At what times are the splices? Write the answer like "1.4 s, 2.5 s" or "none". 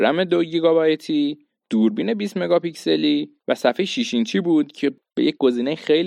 3.4 s